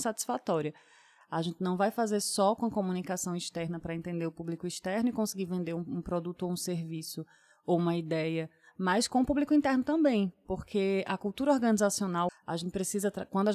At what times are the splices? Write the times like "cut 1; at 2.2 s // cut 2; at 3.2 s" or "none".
cut 1; at 1.2 s // cut 2; at 12.3 s